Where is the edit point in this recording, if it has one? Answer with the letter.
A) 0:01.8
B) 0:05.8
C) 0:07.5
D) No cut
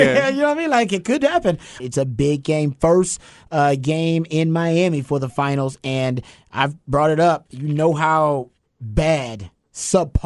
A